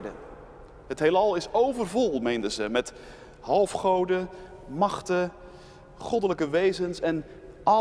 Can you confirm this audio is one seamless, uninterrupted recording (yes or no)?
yes